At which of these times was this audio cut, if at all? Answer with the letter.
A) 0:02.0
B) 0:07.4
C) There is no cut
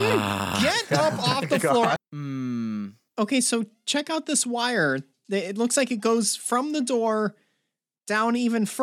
A